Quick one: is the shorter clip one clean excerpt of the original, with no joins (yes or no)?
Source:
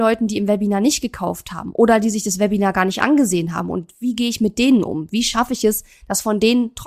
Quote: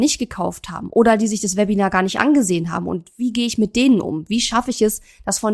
yes